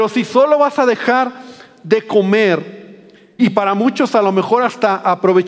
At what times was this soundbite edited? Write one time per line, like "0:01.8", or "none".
0:03.4